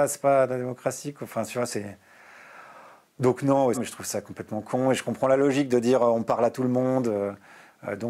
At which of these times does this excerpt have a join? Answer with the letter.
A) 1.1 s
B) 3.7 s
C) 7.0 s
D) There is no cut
B